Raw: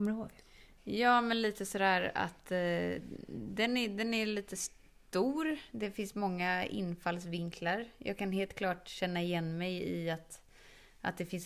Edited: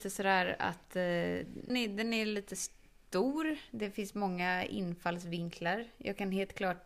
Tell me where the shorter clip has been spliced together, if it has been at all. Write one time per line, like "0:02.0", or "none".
0:01.7